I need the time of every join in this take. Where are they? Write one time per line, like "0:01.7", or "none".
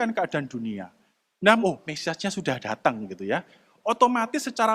0:01.6

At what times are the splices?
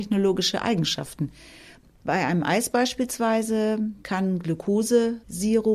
none

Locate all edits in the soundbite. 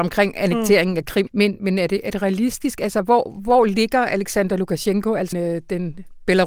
0:01.3
0:05.3

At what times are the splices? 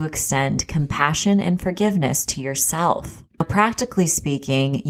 0:03.3

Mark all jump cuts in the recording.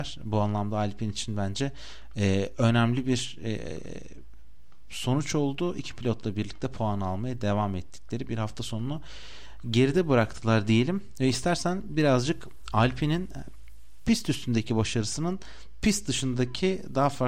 none

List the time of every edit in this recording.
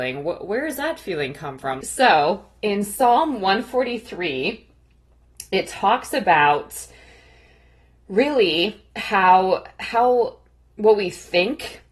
0:01.8

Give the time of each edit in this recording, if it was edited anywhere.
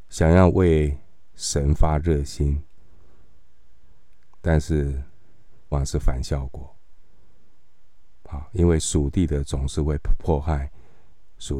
0:05.7

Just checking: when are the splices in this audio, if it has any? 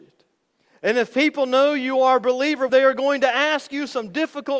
0:02.7

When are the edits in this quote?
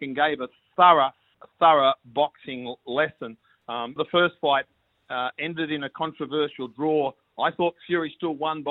0:04.0

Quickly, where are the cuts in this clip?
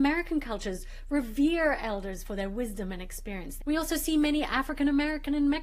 0:03.6

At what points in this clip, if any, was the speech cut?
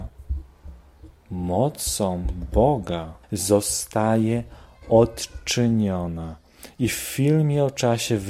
0:03.2

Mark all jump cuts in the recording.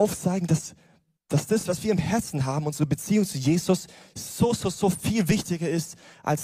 none

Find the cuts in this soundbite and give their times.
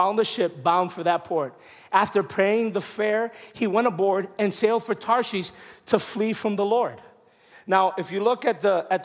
0:07.5

